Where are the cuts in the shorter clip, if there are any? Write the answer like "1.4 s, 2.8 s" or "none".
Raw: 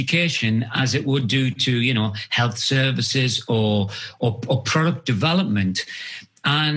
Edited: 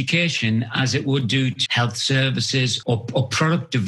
1.7 s, 2.8 s